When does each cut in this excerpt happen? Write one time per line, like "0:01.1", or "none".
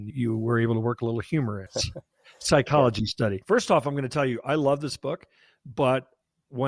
0:01.7